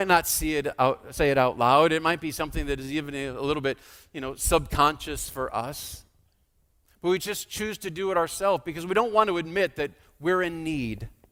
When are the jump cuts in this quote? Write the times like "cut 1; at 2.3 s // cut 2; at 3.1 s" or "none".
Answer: none